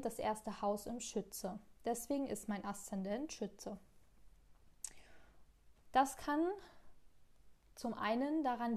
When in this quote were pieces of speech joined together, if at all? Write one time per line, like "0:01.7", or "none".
0:05.8